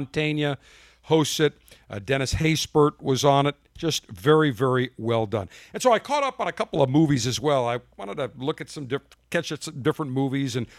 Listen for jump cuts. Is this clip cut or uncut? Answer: uncut